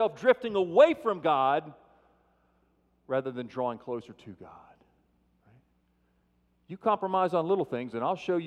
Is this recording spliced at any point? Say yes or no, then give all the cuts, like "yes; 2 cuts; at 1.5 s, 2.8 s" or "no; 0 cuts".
no; 0 cuts